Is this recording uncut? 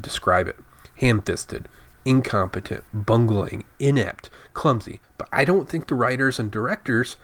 no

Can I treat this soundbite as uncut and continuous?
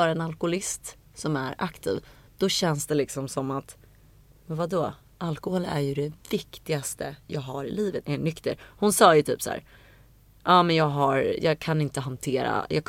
no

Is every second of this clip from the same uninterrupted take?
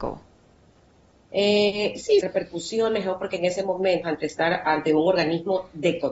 no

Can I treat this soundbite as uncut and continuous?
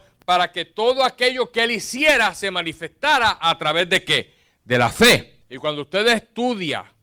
no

